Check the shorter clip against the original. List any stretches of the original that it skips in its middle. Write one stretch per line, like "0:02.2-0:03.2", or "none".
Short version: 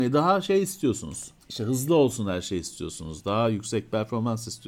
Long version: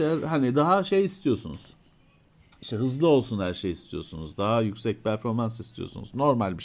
0:01.8-0:02.5